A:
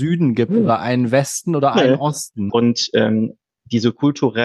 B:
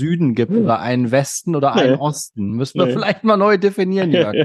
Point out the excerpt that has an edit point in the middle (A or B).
A